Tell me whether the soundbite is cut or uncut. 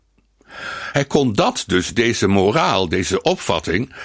uncut